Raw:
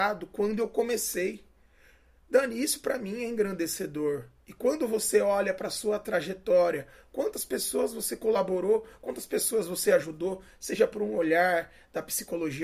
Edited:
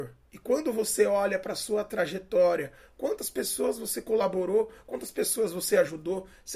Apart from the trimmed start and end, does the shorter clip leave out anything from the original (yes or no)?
no